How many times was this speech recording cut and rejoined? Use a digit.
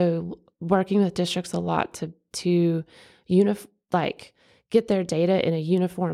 0